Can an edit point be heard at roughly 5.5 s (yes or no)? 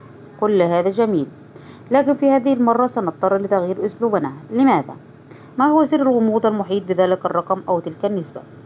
yes